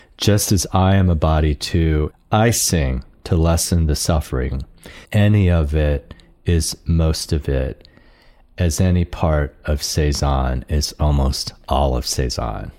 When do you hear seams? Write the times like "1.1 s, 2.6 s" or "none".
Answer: 2.1 s, 5.1 s